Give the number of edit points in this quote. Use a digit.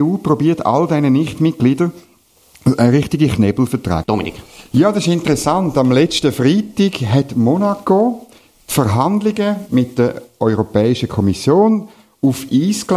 1